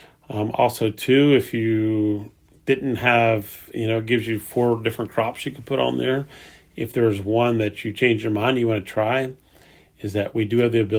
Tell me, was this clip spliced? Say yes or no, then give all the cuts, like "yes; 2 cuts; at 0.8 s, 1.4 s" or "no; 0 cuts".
no; 0 cuts